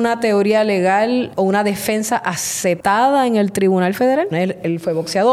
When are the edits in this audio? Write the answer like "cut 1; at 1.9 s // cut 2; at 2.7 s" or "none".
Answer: cut 1; at 4.3 s